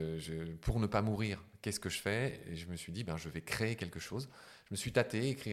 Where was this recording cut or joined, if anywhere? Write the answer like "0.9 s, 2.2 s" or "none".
none